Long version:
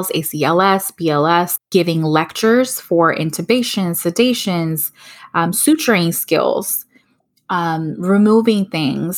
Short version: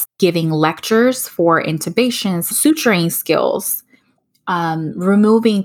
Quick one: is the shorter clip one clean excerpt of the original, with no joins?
no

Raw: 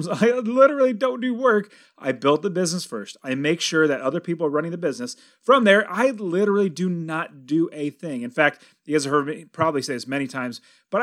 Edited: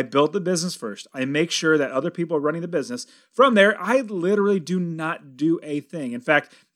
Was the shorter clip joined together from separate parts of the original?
no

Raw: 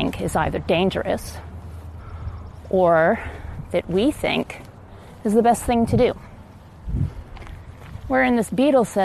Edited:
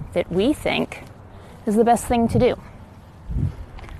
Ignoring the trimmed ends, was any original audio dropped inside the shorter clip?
no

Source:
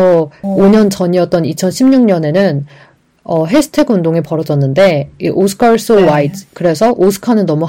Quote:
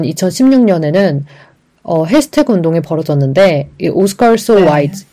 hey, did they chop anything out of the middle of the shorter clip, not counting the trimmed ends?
no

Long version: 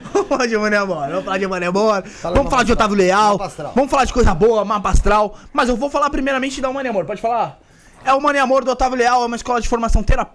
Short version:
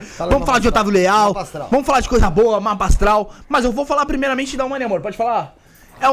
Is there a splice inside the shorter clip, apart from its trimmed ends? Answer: no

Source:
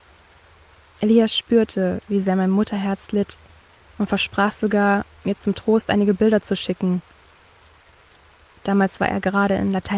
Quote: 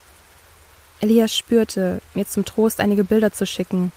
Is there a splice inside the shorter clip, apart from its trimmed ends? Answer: yes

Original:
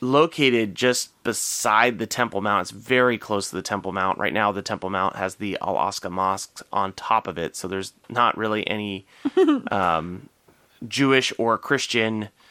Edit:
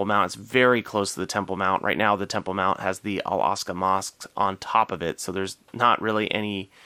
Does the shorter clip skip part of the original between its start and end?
no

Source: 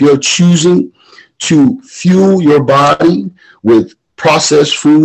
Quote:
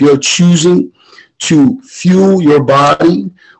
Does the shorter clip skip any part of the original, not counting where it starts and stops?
no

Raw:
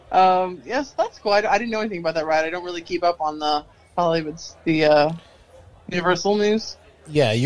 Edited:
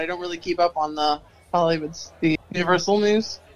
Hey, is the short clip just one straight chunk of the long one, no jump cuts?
no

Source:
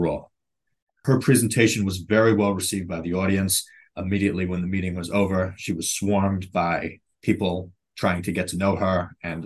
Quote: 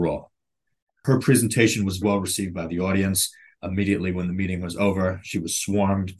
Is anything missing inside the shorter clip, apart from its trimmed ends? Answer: yes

